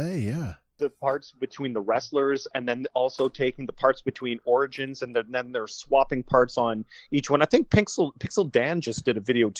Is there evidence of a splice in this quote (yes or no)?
no